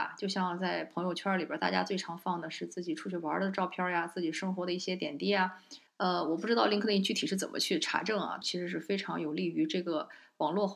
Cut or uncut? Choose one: cut